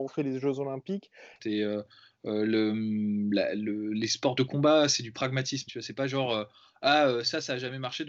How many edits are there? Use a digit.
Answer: 2